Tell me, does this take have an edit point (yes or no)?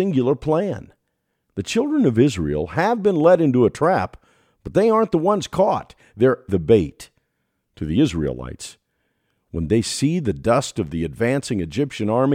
yes